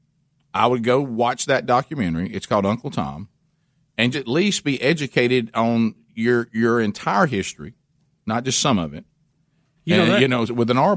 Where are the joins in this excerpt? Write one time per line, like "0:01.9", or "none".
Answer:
0:04.1
0:09.8

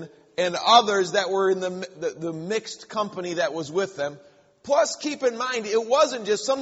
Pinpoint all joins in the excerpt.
none

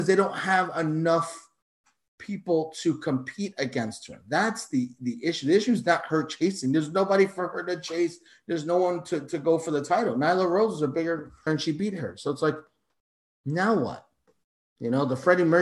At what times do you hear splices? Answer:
0:11.5

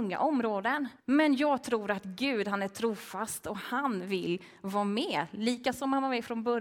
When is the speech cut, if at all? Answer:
0:01.0

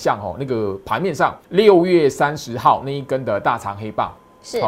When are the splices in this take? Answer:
0:01.4

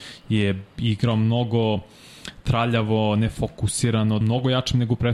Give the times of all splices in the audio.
0:04.2

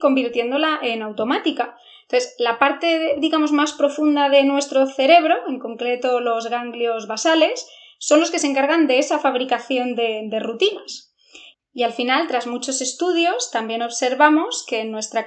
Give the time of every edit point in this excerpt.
0:11.5

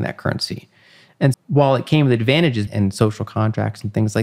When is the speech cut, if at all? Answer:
0:01.3
0:02.7

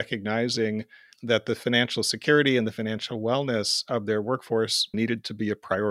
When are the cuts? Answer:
0:01.1
0:04.9

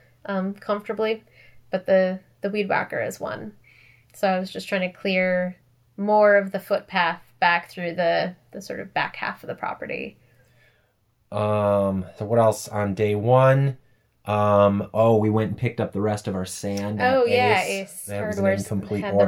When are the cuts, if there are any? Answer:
0:12.2

